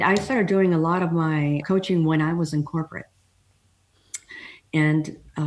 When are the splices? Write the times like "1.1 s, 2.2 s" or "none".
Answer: 1.6 s